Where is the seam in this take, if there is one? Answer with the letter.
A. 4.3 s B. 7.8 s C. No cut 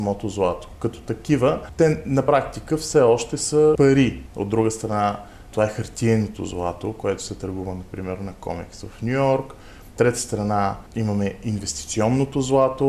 A